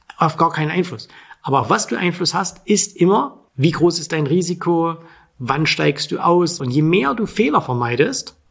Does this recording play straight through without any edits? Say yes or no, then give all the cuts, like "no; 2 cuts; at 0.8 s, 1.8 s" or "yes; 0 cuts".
no; 1 cut; at 6.6 s